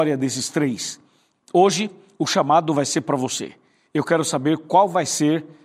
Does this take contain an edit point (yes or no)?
yes